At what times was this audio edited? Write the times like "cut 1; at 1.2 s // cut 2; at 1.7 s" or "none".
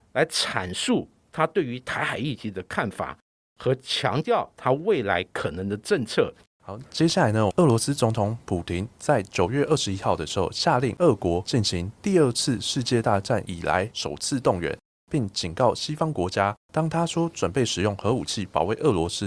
cut 1; at 6.4 s // cut 2; at 7.5 s // cut 3; at 16.6 s